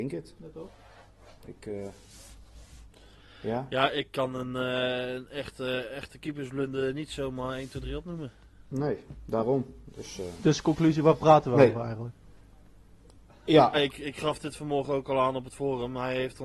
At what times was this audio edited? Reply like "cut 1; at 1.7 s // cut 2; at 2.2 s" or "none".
cut 1; at 13.7 s

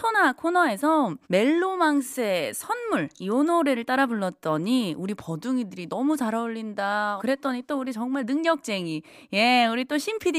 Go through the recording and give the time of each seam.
cut 1; at 1.2 s // cut 2; at 7.2 s

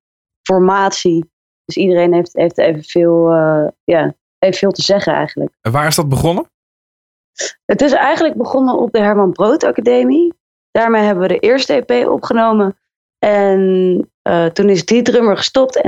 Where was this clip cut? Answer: cut 1; at 10.6 s

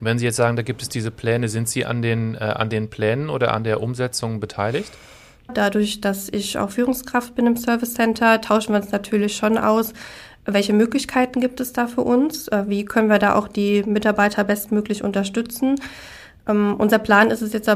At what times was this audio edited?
cut 1; at 5.5 s

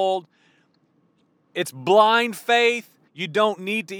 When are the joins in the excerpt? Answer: cut 1; at 3.1 s

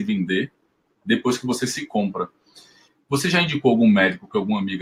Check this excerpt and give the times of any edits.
cut 1; at 3.0 s

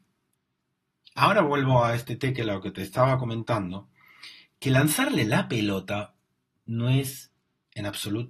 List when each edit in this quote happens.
none

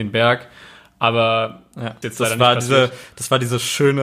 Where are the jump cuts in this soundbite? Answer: cut 1; at 2.0 s

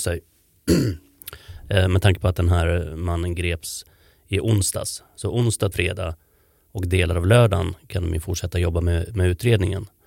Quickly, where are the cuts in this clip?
cut 1; at 5.7 s

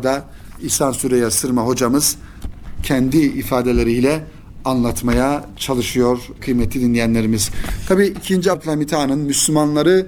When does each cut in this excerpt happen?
cut 1; at 8.5 s

